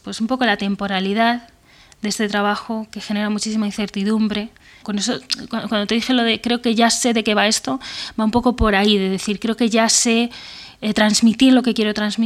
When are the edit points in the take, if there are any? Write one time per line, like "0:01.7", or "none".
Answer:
0:04.8

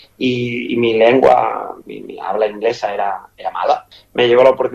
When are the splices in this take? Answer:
0:01.8

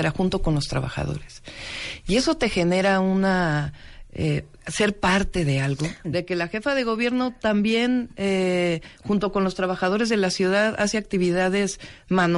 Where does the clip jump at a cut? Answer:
0:06.0

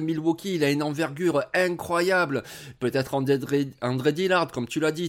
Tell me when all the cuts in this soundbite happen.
0:02.8

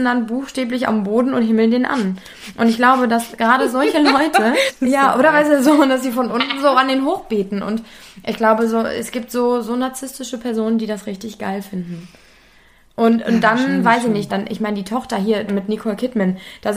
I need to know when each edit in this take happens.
0:04.7
0:14.3
0:15.5

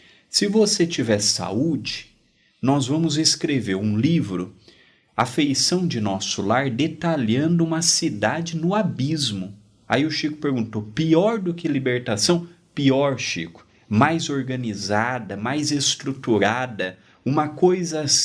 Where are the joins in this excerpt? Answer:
none

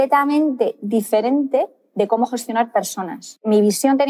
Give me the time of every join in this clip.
none

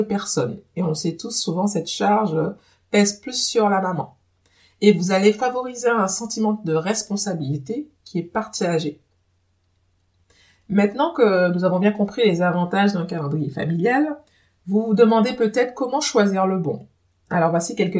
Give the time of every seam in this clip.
none

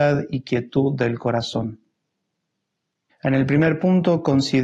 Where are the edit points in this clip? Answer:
0:03.1

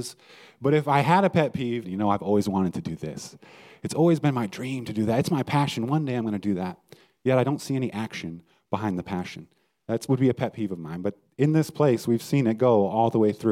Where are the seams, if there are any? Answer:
0:01.8

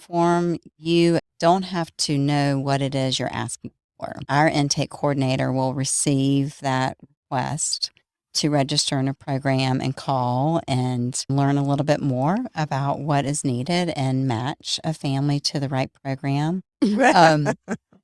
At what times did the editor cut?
0:01.2
0:16.8

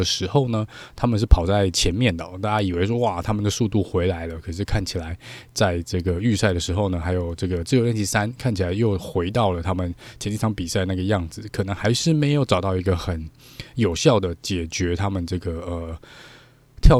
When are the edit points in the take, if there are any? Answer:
none

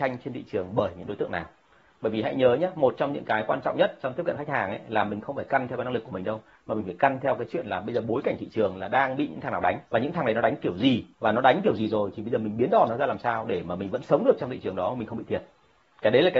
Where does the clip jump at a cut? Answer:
0:09.9
0:11.1

